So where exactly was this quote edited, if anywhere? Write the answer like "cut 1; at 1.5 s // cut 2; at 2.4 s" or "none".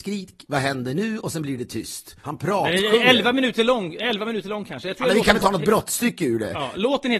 cut 1; at 2.2 s